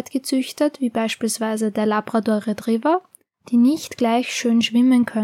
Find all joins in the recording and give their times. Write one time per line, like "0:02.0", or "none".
0:03.3

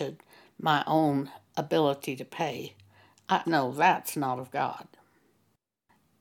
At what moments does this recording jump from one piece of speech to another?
0:03.4

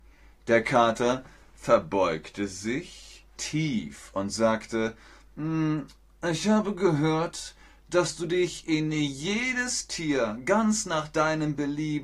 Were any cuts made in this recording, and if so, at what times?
none

